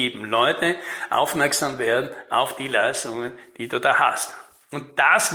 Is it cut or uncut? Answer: uncut